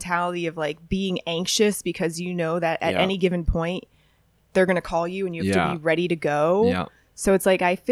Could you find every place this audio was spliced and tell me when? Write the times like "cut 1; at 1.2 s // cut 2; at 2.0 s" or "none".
none